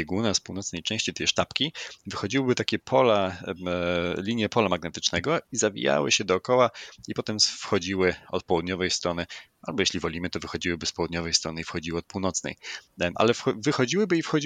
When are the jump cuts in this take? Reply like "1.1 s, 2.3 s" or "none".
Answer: none